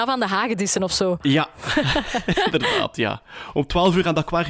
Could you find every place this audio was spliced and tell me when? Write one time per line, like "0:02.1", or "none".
none